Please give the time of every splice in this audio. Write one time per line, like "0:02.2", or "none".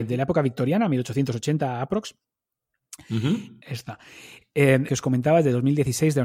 0:03.6
0:04.9